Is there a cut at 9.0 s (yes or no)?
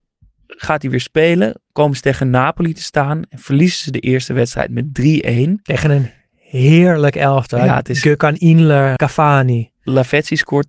yes